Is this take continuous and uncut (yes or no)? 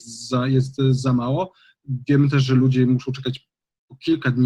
yes